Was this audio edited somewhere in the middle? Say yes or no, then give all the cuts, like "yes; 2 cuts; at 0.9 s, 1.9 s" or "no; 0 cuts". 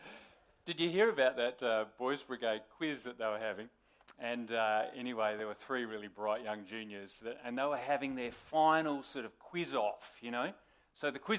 no; 0 cuts